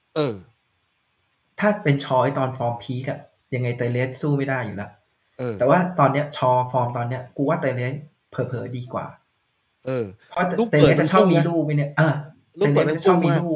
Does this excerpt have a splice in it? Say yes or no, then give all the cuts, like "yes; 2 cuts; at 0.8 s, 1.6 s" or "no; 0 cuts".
no; 0 cuts